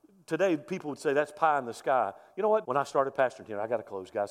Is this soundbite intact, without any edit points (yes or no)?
no